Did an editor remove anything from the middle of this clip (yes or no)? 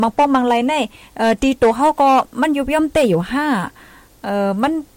no